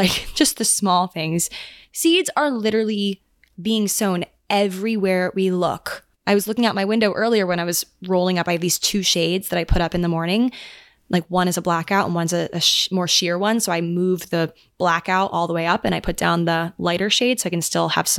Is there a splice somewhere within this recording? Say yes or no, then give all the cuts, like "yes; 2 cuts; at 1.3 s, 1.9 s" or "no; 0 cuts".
yes; 1 cut; at 6.1 s